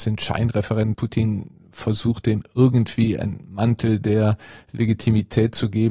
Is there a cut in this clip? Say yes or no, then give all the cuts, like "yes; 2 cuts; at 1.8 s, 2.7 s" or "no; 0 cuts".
yes; 1 cut; at 0.9 s